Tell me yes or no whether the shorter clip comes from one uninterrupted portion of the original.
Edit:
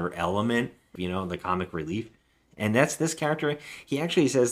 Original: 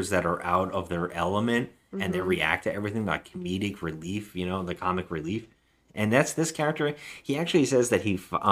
no